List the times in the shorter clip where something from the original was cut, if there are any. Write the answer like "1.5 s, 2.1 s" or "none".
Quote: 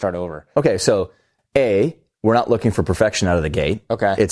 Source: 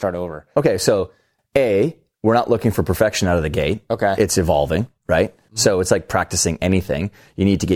none